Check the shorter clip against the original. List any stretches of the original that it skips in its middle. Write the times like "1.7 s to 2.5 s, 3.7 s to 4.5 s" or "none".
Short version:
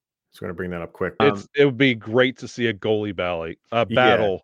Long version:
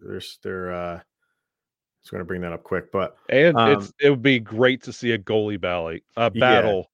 2.9 s to 3.6 s